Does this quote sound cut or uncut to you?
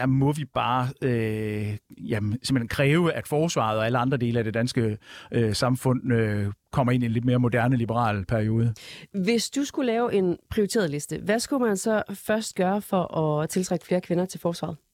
uncut